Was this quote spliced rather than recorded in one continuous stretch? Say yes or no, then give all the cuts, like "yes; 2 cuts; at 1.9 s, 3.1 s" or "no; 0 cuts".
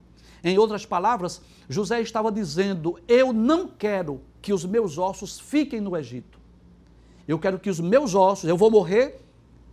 no; 0 cuts